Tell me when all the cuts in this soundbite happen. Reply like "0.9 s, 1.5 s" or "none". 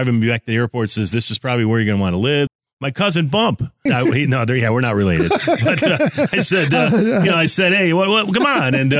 2.5 s, 3.9 s